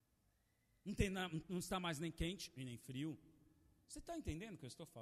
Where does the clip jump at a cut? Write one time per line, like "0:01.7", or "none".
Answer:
0:01.4